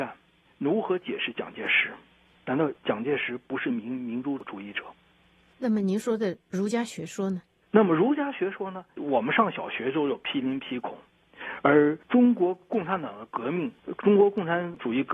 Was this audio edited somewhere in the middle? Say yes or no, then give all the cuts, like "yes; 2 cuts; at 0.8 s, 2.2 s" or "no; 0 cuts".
yes; 1 cut; at 9.0 s